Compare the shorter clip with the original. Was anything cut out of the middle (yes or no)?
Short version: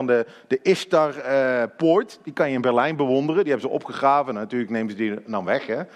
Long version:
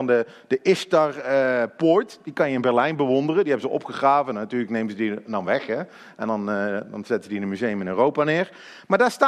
no